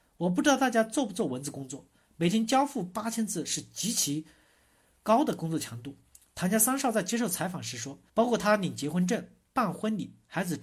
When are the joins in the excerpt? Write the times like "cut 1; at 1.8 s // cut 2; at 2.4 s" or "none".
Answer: cut 1; at 8.1 s